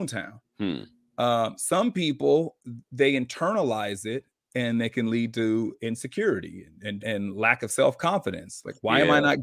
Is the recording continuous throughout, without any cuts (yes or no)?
no